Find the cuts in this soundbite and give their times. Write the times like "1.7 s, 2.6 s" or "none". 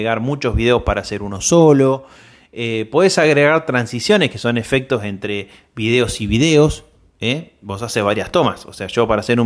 none

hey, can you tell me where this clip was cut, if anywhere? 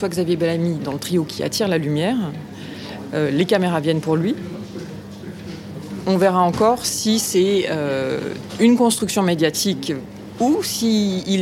none

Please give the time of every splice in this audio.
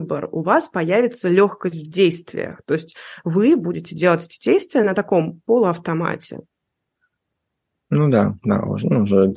none

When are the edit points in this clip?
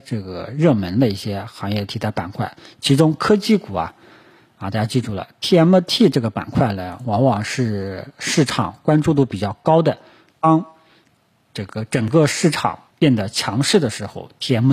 10.3 s, 12.9 s

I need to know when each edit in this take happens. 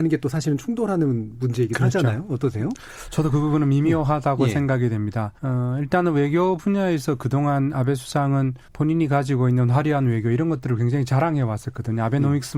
5.4 s, 8.7 s

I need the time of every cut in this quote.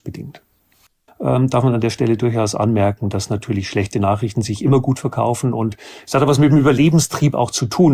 1.1 s

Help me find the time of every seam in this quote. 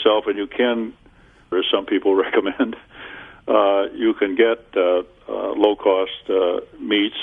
1.5 s

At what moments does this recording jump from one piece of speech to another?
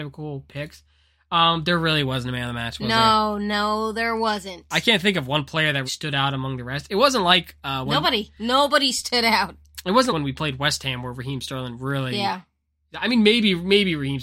5.9 s, 10.1 s

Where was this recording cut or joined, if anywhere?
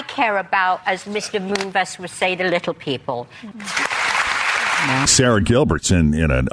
3.5 s, 5.1 s

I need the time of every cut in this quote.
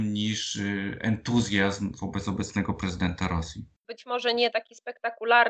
3.8 s

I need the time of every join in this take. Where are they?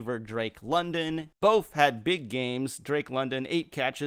1.3 s

